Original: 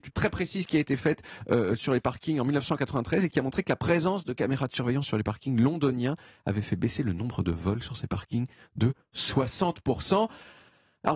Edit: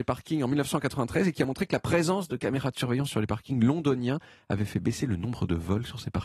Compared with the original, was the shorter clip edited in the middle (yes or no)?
no